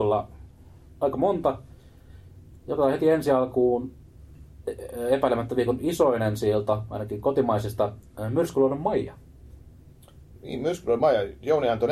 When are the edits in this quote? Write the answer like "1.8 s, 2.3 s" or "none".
none